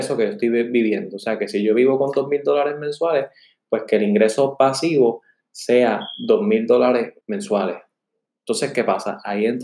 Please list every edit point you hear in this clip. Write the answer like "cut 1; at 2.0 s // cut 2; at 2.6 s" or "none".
cut 1; at 7.2 s